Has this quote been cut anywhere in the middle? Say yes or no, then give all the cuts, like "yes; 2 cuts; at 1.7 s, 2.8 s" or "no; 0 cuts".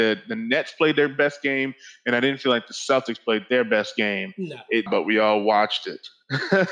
yes; 1 cut; at 4.9 s